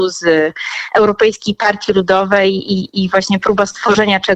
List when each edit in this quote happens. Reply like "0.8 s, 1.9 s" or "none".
3.4 s